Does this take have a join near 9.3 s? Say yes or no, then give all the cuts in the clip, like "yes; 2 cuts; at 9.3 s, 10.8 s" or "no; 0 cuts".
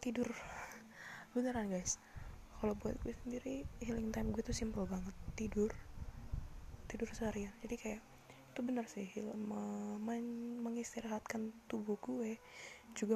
yes; 1 cut; at 9.3 s